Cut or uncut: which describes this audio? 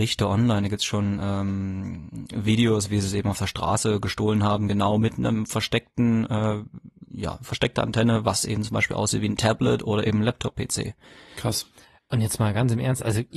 uncut